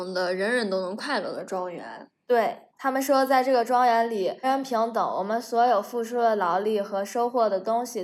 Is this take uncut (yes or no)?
no